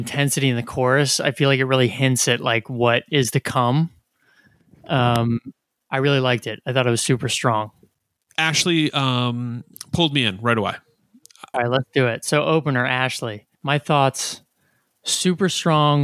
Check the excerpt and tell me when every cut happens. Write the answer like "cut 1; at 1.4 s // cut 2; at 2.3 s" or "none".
cut 1; at 11.5 s // cut 2; at 13.5 s